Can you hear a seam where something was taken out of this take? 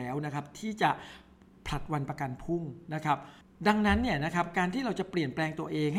no; 0 cuts

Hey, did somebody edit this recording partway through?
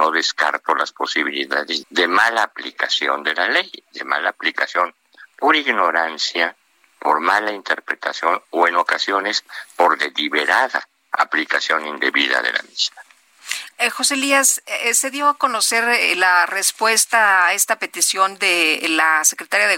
yes; 1 cut; at 1.8 s

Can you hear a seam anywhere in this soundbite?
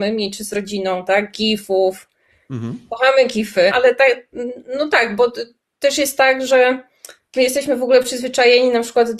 yes; 1 cut; at 3.7 s

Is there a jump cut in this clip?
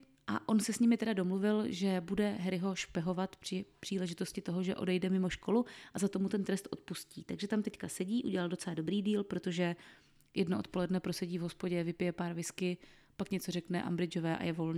no; 0 cuts

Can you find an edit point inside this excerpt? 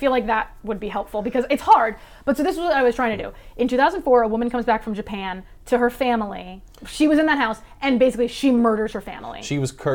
no; 0 cuts

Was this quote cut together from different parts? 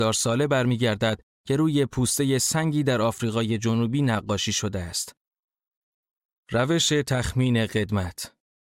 no; 0 cuts

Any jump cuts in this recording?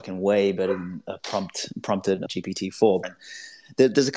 yes; 1 cut; at 3.0 s

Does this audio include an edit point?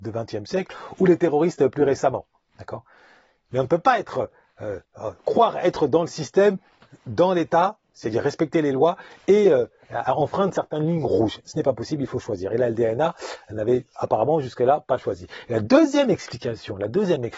no; 0 cuts

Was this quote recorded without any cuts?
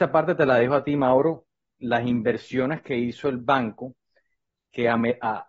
yes; 0 cuts

